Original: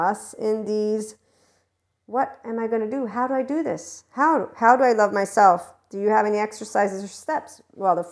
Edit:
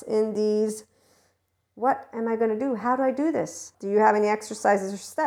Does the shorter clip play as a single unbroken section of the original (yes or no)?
no